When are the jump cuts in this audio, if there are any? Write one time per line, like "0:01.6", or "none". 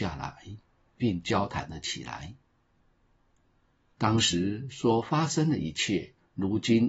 0:03.9